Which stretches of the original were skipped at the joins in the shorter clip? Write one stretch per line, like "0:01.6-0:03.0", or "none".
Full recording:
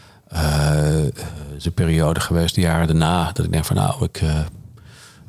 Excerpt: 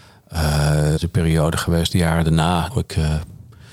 0:01.0-0:01.6
0:03.3-0:03.9